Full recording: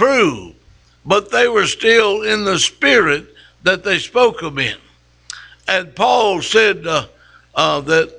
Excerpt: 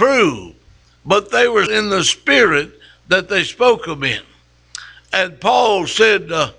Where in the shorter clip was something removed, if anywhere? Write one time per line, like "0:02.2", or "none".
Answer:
0:01.7